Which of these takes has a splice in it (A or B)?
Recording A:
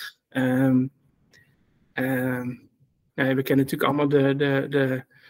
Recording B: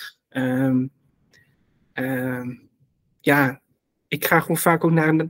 A